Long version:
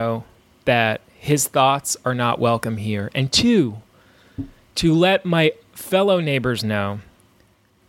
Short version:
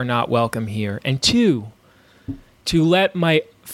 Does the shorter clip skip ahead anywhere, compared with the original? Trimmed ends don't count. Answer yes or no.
no